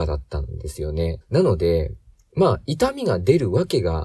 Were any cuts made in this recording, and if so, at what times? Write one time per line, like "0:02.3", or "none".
0:01.2